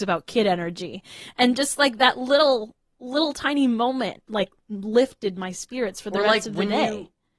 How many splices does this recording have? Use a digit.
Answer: 0